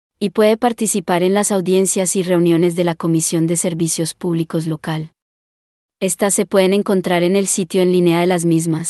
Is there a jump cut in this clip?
no; 0 cuts

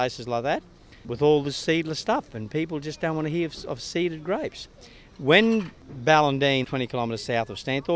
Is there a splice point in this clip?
yes; 2 cuts; at 5.1 s, 6.6 s

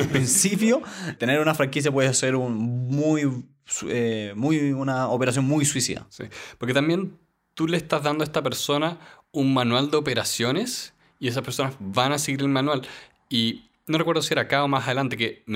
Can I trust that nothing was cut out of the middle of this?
no; 1 cut; at 1.2 s

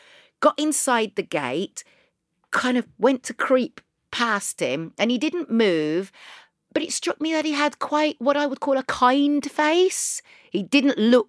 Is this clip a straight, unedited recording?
yes; 0 cuts

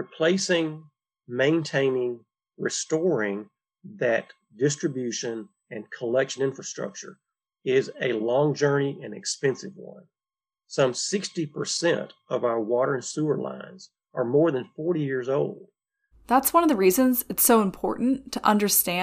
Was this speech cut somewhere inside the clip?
yes; 2 cuts; at 10.5 s, 16.1 s

